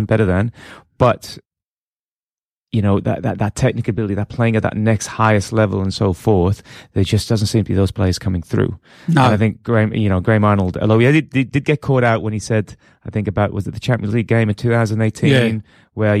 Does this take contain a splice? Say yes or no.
no